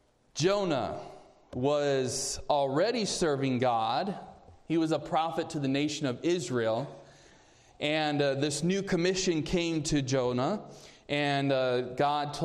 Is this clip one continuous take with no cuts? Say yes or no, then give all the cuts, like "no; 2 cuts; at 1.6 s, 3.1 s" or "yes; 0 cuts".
yes; 0 cuts